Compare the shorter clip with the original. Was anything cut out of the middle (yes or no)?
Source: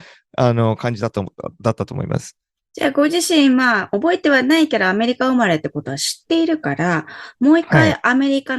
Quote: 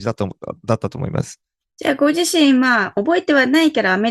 no